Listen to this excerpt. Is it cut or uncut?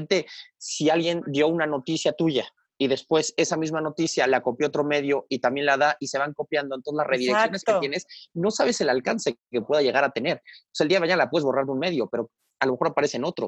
uncut